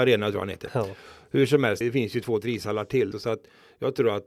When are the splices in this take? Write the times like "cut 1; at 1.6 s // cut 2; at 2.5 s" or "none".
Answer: cut 1; at 1.8 s // cut 2; at 3.1 s